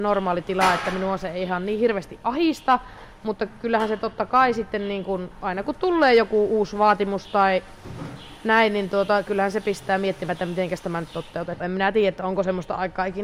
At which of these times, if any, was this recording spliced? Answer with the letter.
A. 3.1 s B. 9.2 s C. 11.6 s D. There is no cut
C